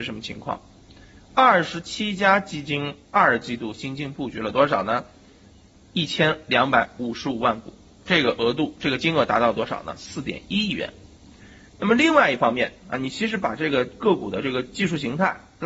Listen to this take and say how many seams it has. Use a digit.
0